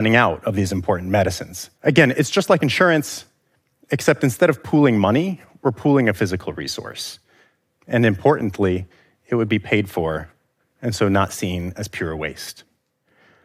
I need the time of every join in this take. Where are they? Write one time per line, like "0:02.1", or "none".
0:01.7